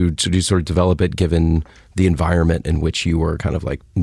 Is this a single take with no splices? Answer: yes; 0 cuts

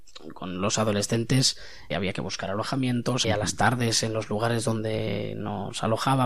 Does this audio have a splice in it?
yes; 2 cuts; at 1.9 s, 3.2 s

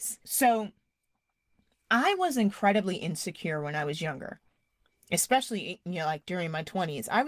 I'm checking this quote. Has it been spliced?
no; 0 cuts

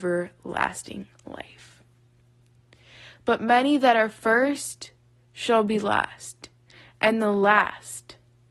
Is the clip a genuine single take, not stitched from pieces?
yes; 0 cuts

